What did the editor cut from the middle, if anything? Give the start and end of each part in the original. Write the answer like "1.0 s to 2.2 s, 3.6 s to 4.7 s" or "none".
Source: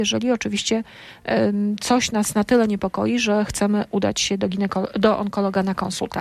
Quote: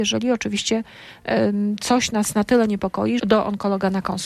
3.2 s to 4.9 s

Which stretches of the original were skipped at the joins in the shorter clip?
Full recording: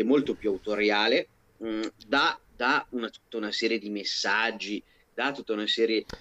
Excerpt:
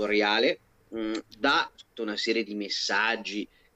2.4 s to 3.1 s

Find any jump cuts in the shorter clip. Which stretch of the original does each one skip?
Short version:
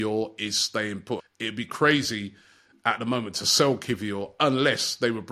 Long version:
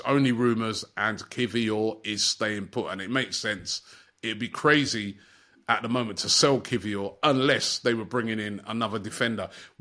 2.8 s to 4.0 s

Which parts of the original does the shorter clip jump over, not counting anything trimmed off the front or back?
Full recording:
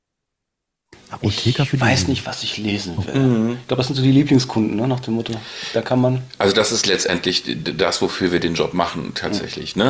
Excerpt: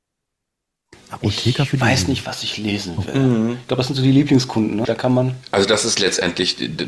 4.8 s to 5.7 s

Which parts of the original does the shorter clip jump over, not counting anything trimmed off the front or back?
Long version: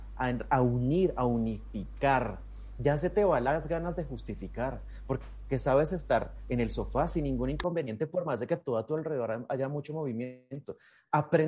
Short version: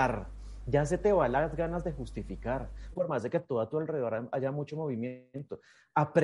5.0 s to 8.1 s

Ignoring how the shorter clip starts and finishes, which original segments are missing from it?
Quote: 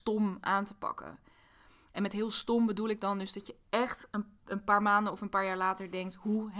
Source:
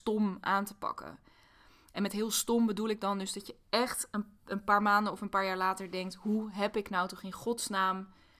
none

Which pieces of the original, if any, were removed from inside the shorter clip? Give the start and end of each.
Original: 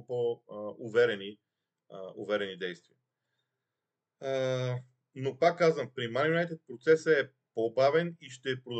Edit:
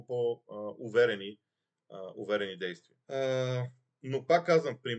3.0 s to 4.1 s

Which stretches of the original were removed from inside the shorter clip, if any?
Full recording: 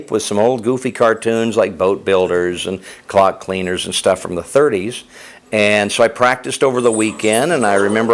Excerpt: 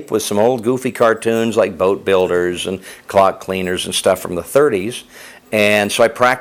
none

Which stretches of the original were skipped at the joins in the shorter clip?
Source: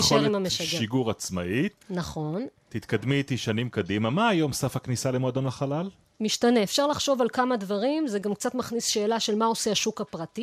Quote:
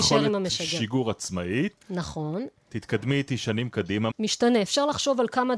4.1 s to 6.1 s

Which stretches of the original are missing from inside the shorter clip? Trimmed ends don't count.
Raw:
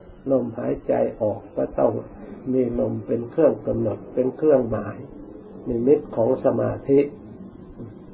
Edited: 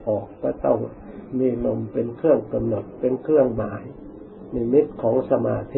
none

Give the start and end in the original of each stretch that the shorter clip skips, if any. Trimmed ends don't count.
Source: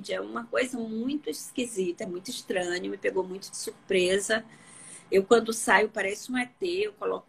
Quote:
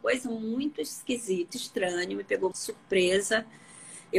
2.0 s to 2.2 s, 3.3 s to 3.5 s

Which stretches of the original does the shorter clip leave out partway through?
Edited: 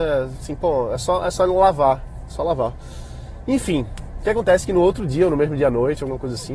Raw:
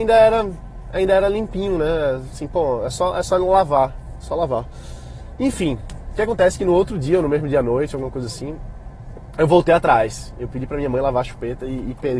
none

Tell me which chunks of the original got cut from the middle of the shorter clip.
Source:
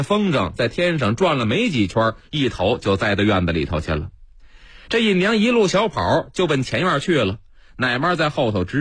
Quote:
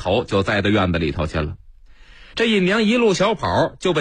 none

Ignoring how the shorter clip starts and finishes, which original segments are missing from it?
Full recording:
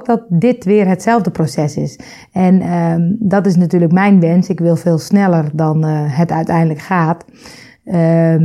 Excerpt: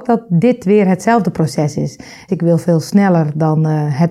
2.3 s to 4.5 s

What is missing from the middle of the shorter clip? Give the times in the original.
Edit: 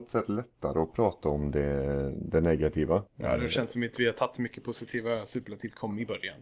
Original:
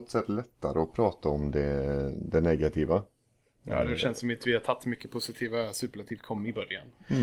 3.1 s to 3.5 s

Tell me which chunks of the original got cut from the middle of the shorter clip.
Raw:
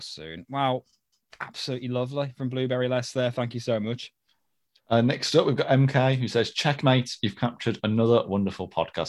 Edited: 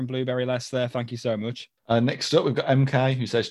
4.2 s to 4.8 s

